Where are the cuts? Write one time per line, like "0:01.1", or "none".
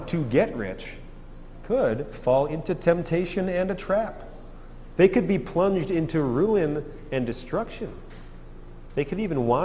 0:05.0